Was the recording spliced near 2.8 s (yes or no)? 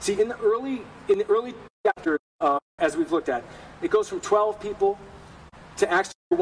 yes